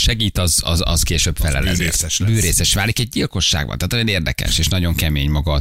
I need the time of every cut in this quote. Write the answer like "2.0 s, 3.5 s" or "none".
none